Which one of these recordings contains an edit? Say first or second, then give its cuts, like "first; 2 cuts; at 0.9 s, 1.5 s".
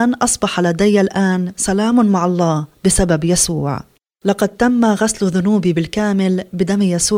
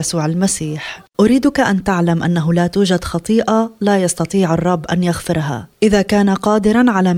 second; 2 cuts; at 1.1 s, 5.7 s